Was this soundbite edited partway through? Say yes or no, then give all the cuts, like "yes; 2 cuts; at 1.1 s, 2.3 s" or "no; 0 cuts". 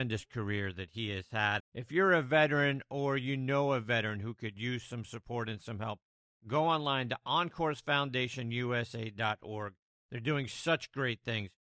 yes; 1 cut; at 1.6 s